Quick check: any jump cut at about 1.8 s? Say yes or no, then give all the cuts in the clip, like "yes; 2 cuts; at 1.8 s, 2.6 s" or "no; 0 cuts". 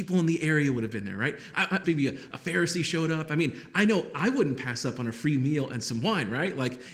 yes; 1 cut; at 1.8 s